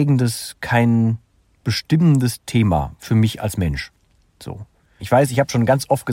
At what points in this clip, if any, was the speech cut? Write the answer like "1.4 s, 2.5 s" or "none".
5.0 s